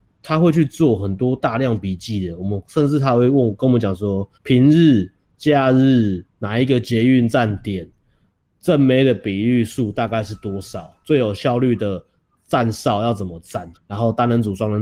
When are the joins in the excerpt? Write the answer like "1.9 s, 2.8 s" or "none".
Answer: 4.3 s, 13.7 s